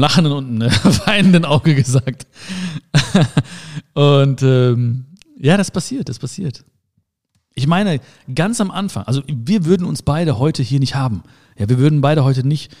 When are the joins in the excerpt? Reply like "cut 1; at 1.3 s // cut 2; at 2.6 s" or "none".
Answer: none